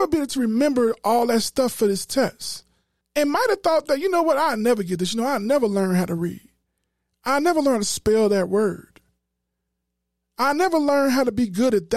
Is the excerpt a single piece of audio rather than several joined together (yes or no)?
no